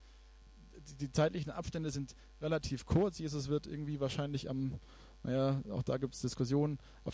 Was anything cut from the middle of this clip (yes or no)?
no